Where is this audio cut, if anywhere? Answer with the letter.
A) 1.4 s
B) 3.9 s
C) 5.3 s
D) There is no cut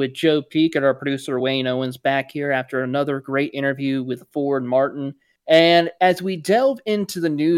D